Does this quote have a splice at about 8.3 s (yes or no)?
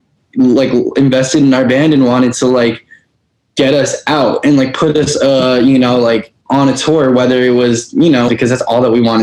yes